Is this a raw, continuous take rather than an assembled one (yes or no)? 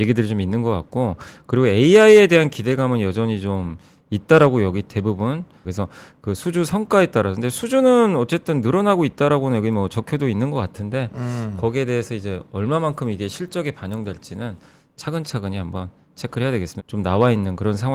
no